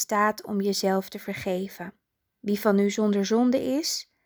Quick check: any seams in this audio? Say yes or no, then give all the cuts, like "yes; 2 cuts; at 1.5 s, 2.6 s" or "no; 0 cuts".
yes; 1 cut; at 2.3 s